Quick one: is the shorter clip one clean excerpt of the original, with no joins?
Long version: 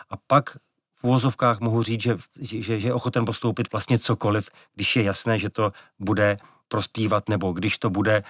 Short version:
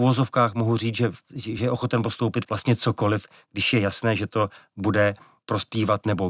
no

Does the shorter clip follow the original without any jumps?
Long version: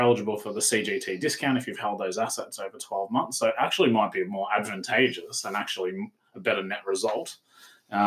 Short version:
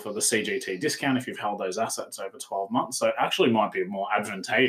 yes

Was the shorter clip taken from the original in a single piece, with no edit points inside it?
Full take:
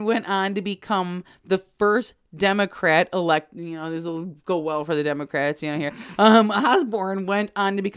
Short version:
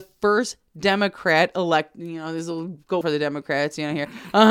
no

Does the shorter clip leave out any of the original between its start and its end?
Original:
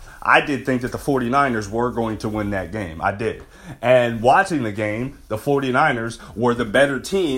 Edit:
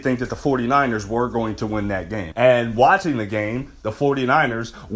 yes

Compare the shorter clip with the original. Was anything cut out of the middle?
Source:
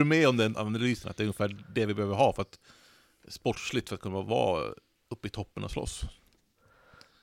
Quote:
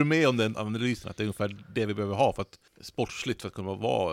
yes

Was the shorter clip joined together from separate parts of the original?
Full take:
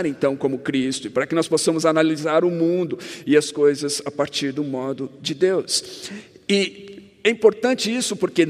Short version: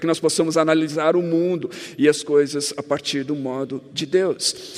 no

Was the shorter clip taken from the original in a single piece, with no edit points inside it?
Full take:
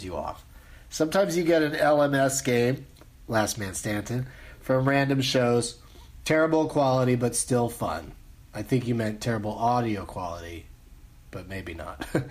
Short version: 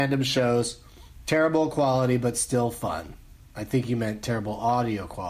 yes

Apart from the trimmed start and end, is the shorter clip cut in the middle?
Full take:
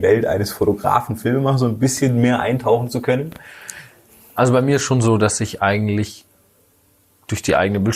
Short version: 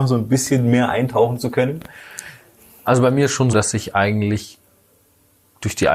yes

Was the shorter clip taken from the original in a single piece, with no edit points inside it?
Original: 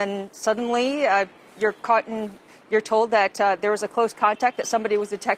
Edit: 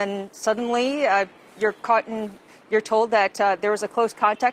yes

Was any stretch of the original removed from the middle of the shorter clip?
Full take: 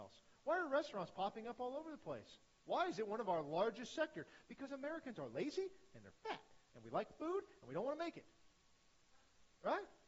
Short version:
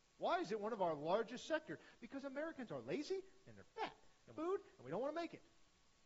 yes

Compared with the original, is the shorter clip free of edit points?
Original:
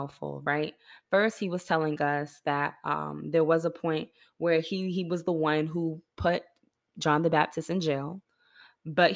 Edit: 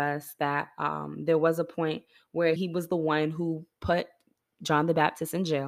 no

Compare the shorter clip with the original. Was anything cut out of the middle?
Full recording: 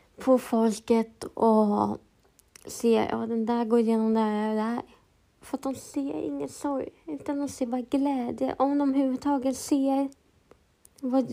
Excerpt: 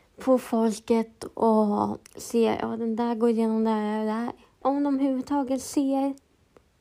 yes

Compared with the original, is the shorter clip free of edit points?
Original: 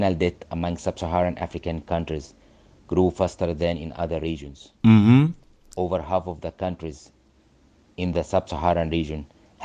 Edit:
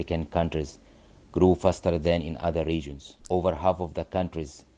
no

